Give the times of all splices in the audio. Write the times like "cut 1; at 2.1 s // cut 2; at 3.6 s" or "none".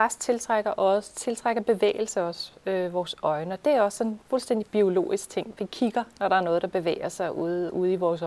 cut 1; at 5.5 s